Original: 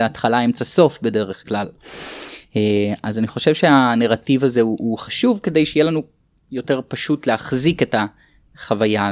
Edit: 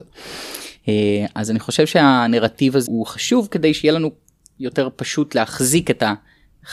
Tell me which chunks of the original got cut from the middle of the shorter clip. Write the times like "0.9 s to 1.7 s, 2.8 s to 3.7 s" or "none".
4.5 s to 4.8 s